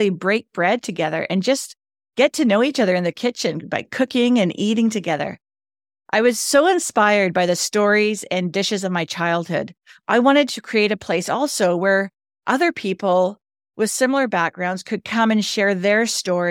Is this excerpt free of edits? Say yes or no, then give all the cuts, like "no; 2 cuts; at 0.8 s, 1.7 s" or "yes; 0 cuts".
yes; 0 cuts